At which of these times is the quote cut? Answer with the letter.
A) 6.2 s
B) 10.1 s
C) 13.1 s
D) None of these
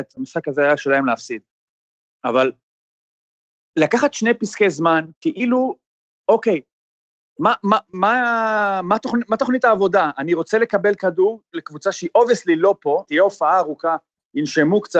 C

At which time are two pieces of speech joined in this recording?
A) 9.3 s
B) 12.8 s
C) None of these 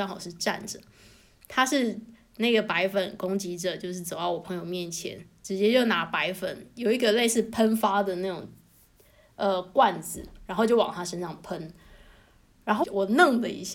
B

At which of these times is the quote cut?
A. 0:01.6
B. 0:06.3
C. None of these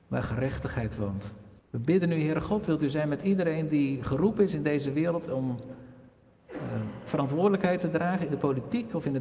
A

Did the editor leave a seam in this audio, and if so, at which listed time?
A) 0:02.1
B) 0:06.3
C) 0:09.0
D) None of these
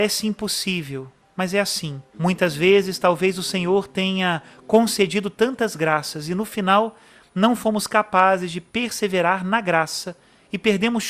A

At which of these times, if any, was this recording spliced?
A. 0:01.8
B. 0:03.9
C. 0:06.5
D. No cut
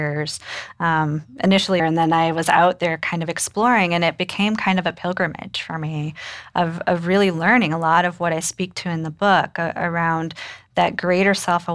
A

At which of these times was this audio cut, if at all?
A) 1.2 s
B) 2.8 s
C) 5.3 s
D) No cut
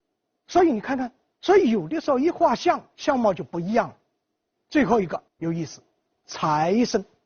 C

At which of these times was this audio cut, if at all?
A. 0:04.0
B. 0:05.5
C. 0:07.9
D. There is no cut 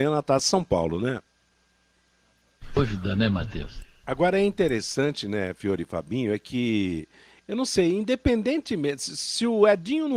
A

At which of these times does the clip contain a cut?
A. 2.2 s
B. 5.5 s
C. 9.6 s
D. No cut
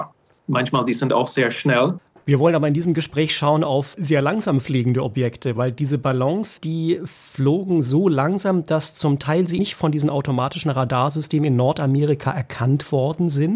C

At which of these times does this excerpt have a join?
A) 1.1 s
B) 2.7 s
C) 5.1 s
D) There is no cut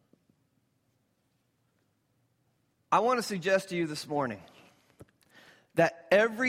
B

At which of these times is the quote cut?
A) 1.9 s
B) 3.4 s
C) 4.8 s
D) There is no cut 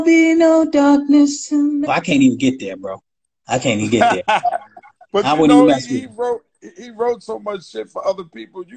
A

